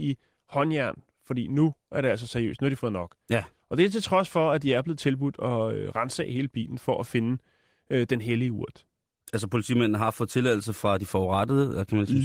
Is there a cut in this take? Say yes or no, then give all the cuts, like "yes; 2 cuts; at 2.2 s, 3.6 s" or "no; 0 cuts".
no; 0 cuts